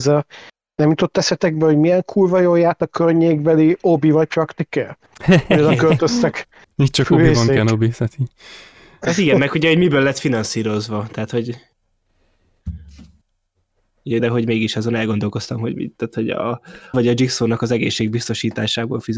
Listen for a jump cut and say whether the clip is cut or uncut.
cut